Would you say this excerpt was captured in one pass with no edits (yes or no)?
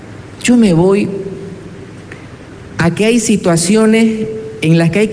yes